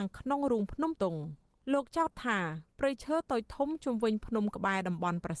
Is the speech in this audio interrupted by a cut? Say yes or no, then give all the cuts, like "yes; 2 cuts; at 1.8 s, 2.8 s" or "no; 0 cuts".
yes; 1 cut; at 1.0 s